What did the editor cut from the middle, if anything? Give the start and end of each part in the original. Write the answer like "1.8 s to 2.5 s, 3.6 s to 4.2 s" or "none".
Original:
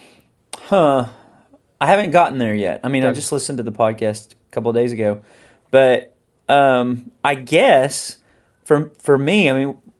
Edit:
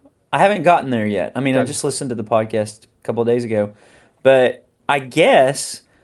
6.3 s to 7.2 s